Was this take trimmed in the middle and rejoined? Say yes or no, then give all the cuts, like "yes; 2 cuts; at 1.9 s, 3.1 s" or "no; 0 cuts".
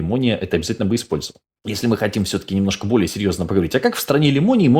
yes; 1 cut; at 1.6 s